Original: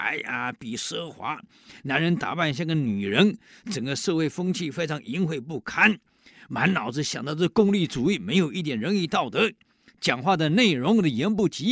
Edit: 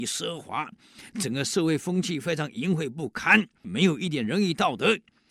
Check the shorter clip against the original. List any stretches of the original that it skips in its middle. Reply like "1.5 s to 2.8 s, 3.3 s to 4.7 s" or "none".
1.8 s to 3.6 s, 6.2 s to 8.2 s